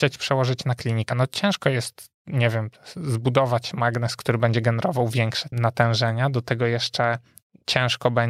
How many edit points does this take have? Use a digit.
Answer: 0